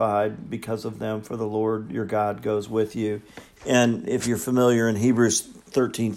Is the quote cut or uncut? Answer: cut